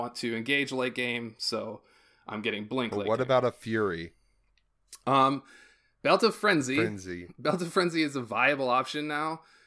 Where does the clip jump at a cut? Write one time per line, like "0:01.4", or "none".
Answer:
none